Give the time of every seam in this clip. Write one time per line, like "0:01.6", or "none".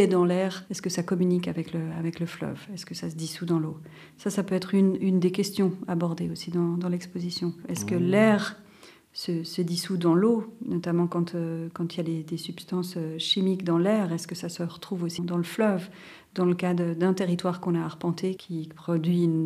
0:07.6
0:15.2
0:18.4

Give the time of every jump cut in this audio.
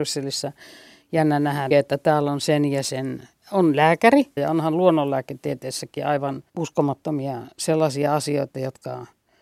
0:01.7
0:04.4
0:06.5

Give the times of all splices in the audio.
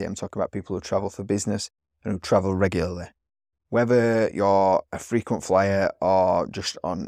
none

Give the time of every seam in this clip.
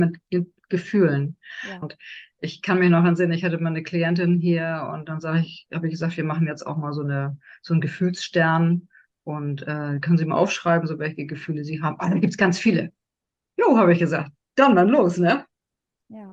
0:01.8

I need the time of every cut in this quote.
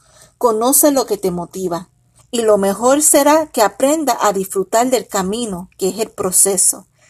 0:02.2

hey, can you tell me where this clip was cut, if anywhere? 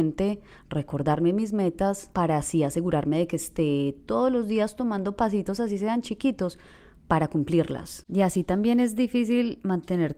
0:08.0

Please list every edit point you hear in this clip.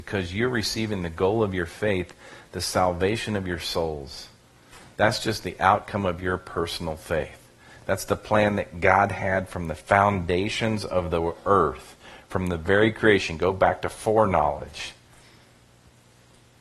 none

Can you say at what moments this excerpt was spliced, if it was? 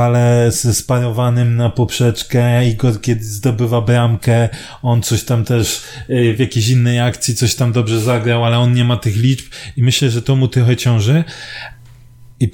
none

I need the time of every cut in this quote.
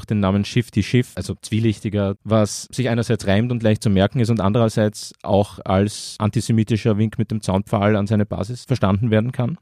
0:02.2

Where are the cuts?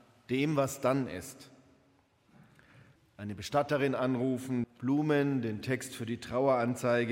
0:03.0
0:04.6

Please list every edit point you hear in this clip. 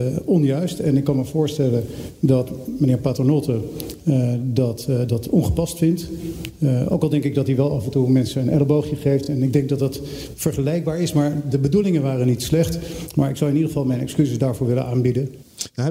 none

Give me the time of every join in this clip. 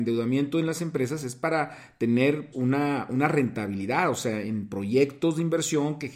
0:02.5

